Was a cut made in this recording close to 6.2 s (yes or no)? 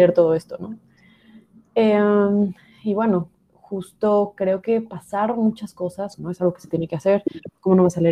yes